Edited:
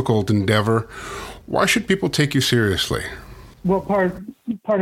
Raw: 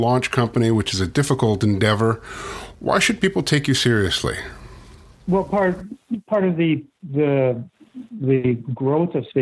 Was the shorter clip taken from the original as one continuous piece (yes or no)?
no